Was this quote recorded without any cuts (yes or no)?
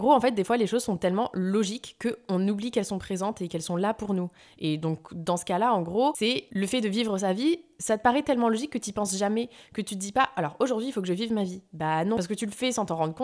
yes